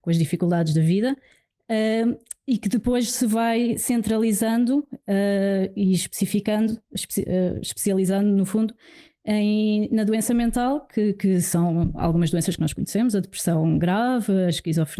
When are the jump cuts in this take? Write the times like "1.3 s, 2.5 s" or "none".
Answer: none